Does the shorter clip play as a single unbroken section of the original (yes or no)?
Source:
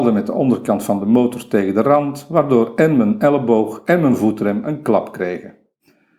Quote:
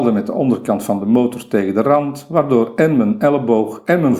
yes